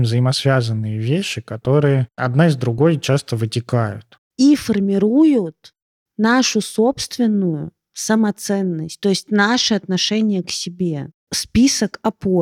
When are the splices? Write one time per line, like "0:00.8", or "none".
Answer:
none